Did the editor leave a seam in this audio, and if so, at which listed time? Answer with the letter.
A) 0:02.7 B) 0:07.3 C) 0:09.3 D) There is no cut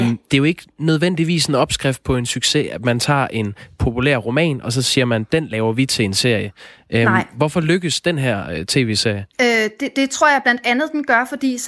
C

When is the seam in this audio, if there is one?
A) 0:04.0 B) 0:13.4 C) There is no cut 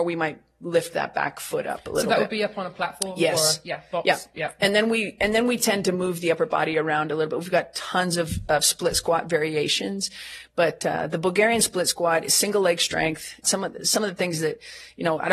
B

